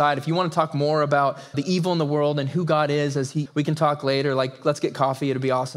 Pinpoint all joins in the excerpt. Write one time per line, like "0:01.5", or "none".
0:01.5
0:03.4